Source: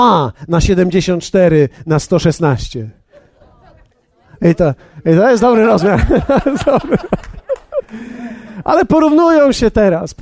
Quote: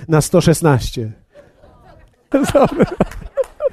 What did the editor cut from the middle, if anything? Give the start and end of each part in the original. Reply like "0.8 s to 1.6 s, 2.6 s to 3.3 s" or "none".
4.1 s to 6.4 s